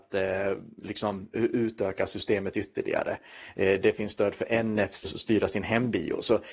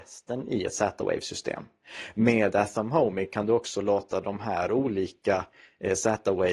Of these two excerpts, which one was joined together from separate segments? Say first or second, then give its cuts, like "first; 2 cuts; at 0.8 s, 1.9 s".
first; 1 cut; at 5.0 s